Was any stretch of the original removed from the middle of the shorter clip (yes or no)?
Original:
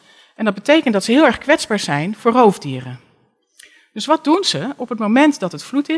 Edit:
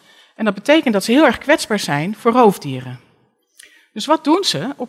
no